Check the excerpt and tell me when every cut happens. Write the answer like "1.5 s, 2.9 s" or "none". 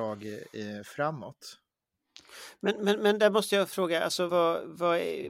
4.3 s